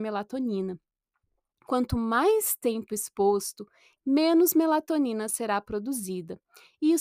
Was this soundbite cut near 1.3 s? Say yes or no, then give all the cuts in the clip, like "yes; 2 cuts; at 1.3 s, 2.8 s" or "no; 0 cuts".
no; 1 cut; at 4.0 s